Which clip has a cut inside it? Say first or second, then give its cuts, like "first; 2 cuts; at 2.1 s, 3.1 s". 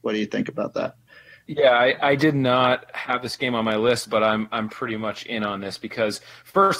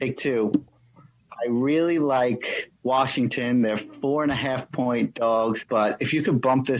second; 2 cuts; at 2.8 s, 5.6 s